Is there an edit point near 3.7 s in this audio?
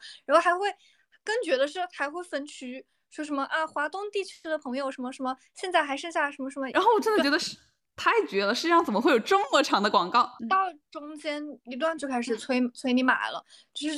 no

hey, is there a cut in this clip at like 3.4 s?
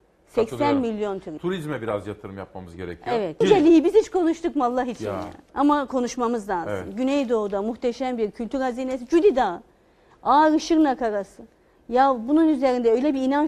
yes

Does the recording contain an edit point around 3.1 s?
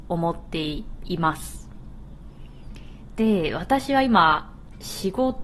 yes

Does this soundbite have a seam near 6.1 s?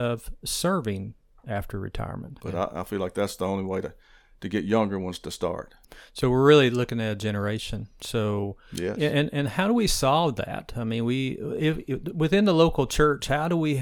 no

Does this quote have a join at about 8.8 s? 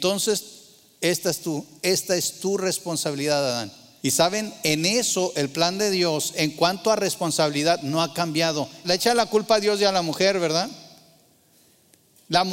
yes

